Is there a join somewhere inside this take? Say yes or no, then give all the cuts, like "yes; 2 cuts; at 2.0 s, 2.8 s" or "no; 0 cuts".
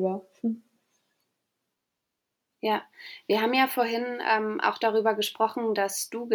no; 0 cuts